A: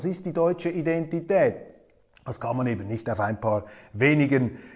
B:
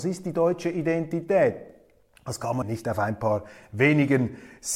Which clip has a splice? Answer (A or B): B